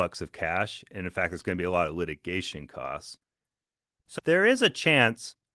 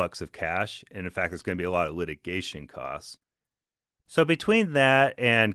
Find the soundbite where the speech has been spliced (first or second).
first